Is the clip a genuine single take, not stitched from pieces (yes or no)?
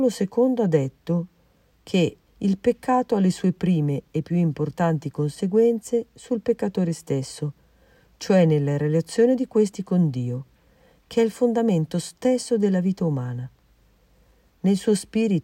no